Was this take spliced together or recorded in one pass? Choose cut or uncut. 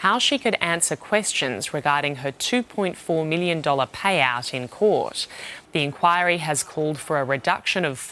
cut